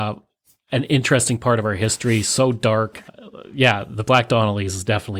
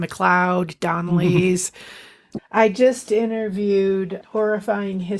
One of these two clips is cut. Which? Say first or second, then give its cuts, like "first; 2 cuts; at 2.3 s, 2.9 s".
second; 2 cuts; at 2.4 s, 4.2 s